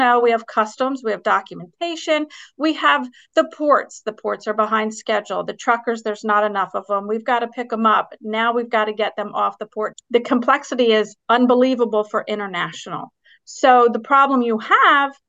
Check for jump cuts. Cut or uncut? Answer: cut